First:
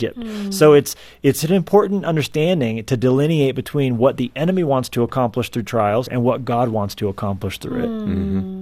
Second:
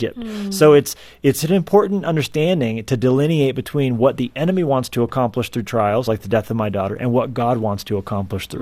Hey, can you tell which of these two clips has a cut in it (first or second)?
first